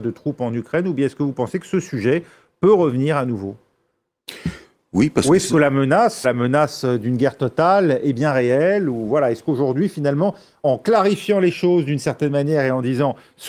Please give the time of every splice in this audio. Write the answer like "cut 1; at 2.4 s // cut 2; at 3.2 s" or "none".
cut 1; at 6.2 s // cut 2; at 10.6 s